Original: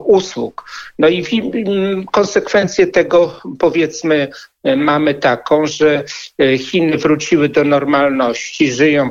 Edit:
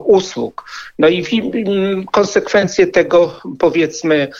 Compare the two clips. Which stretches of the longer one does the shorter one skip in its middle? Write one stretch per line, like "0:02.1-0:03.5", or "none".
none